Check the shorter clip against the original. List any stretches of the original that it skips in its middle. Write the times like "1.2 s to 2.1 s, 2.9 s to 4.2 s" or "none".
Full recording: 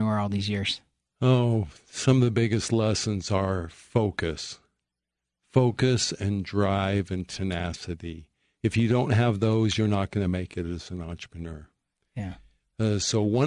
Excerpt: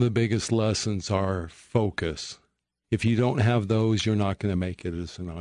5.0 s to 8.6 s

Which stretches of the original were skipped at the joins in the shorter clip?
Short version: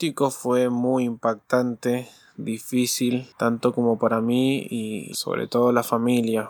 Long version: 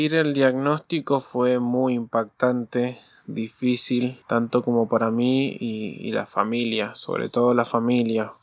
6.0 s to 6.9 s

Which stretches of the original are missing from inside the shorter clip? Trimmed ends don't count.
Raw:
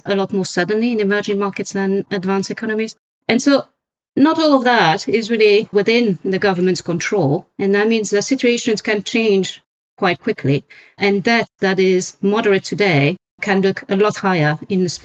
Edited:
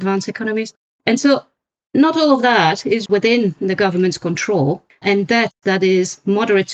5.3 s to 5.7 s, 7.5 s to 10.9 s

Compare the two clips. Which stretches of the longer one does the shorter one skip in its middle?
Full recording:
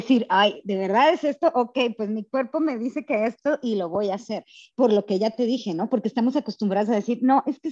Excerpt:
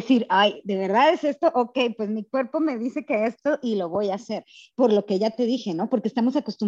none

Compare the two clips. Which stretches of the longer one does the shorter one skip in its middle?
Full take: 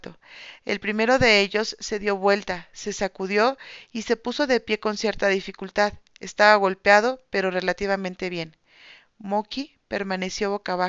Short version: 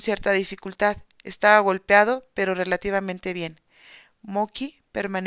none

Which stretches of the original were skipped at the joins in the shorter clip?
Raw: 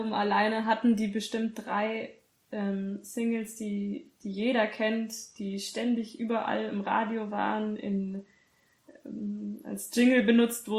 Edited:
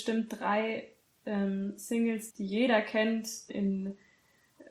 3.5 s to 4.1 s, 5.3 s to 7.8 s

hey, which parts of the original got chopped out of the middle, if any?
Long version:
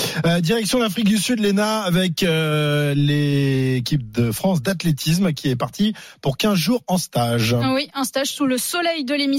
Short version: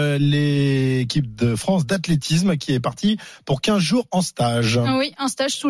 none

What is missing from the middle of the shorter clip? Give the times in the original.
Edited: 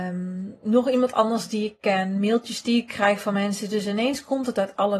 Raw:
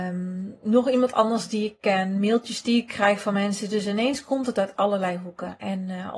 none

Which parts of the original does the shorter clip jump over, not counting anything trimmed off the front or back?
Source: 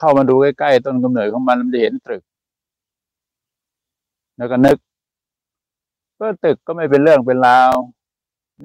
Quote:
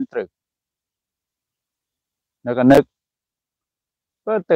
none

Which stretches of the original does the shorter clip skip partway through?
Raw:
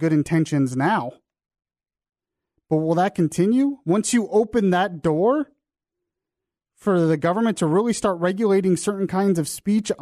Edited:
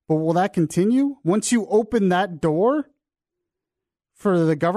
none

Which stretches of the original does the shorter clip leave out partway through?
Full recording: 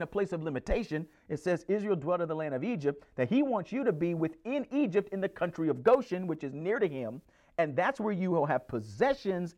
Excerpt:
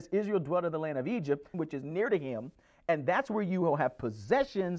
3.1 s to 6.2 s

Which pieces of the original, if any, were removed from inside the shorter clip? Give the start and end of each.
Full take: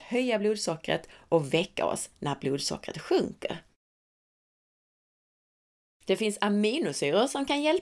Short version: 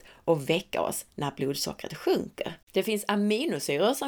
3.7 s to 6.0 s

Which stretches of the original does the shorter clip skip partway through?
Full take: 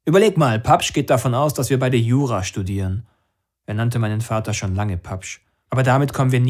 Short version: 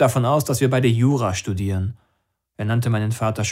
none

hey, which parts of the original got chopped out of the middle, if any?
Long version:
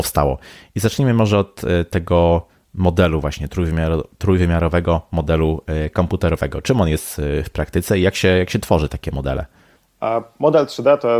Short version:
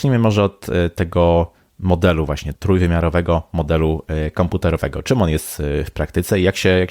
3.5 s to 4.1 s

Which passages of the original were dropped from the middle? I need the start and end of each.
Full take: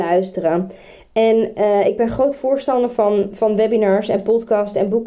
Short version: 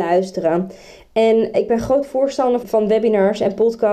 1.5 s to 1.8 s, 2.9 s to 3.3 s

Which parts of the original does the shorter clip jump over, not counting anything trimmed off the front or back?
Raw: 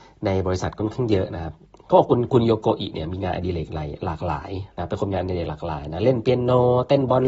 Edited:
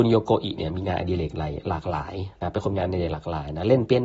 none

